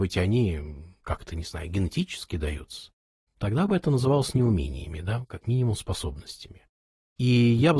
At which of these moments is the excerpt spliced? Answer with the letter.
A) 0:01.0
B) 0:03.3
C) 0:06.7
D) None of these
D